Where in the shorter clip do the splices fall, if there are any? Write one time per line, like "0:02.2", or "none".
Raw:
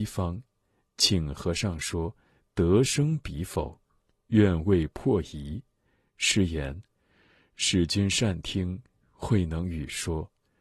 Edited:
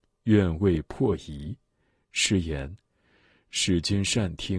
none